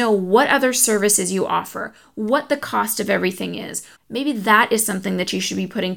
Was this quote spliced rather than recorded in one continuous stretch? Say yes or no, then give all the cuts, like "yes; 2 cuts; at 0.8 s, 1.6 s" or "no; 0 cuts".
yes; 1 cut; at 3.9 s